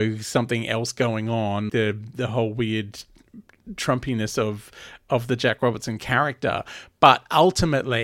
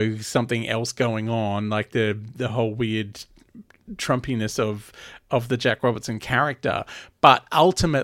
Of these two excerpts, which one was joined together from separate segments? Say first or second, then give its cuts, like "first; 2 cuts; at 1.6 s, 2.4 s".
first; 1 cut; at 1.7 s